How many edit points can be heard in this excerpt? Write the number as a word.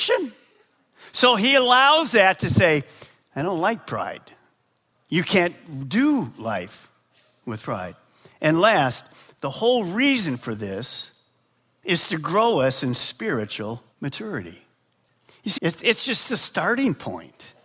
two